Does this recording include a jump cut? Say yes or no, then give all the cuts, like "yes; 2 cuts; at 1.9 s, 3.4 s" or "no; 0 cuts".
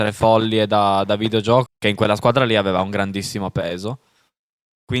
yes; 1 cut; at 1.7 s